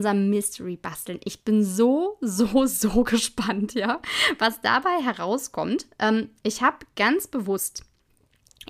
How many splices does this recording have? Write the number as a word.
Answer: zero